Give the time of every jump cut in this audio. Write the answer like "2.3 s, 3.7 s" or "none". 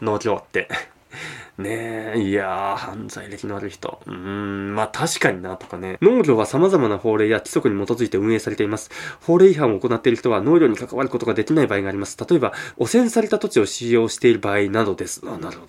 6.0 s, 12.7 s